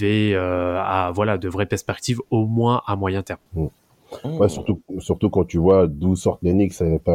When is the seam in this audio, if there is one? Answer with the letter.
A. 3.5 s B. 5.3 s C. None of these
A